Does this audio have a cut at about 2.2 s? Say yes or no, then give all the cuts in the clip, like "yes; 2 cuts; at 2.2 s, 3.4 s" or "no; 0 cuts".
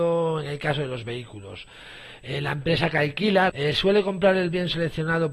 no; 1 cut; at 3.5 s